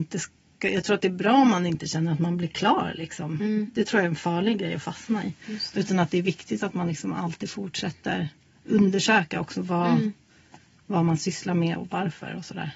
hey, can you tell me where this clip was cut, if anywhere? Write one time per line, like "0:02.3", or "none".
0:11.8